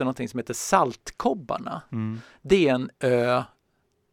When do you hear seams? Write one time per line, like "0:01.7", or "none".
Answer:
none